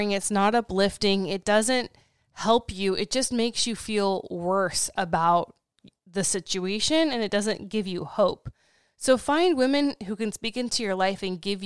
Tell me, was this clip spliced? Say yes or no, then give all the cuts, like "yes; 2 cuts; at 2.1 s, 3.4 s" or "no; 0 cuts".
no; 0 cuts